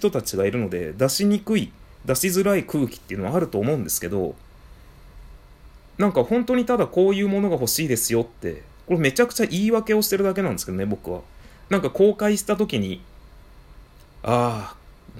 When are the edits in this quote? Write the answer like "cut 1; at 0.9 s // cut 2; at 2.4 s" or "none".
cut 1; at 11.6 s // cut 2; at 14.0 s